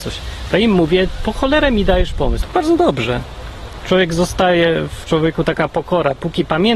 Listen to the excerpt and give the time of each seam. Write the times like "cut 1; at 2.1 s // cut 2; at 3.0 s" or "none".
cut 1; at 2.4 s